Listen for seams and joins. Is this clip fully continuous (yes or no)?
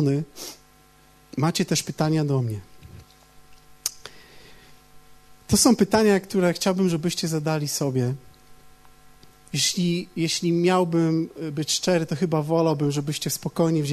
no